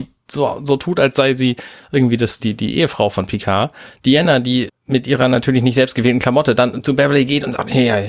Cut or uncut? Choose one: cut